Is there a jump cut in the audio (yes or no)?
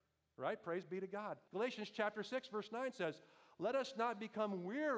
yes